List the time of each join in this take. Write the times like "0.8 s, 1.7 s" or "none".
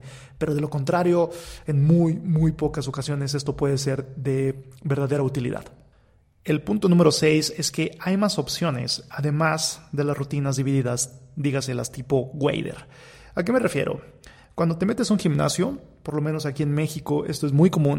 none

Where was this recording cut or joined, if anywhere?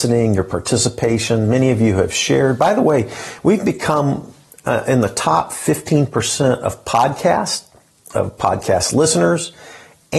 none

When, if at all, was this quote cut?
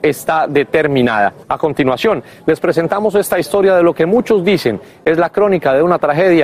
1.4 s

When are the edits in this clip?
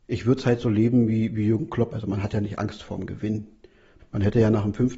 1.9 s, 4.0 s

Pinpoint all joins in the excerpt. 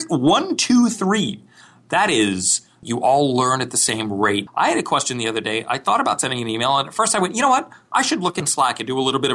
2.8 s, 4.5 s

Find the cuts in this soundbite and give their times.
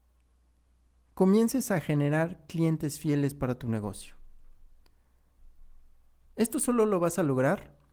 none

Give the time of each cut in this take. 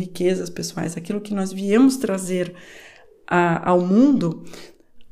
none

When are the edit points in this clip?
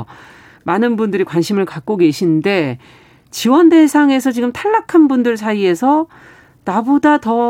none

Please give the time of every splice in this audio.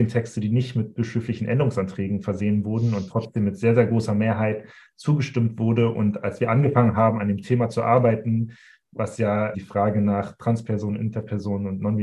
9.5 s

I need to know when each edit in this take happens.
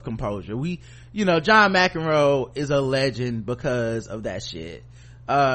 none

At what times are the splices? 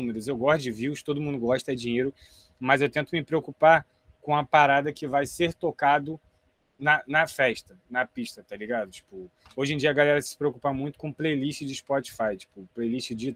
none

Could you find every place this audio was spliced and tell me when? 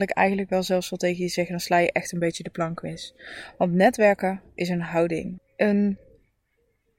5.4 s

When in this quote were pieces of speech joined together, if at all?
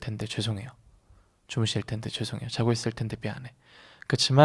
none

